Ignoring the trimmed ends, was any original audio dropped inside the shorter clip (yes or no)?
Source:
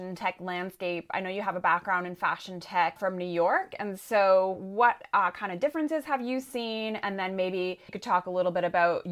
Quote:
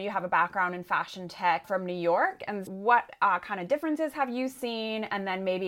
yes